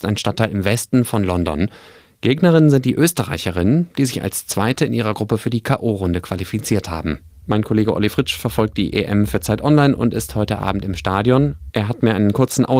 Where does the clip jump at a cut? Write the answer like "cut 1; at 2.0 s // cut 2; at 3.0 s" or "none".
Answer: none